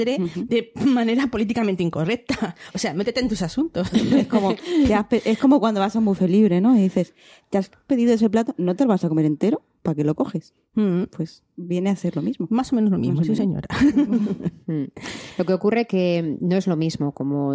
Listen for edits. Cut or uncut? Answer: uncut